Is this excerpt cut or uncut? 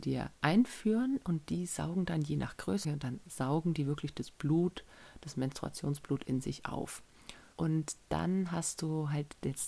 cut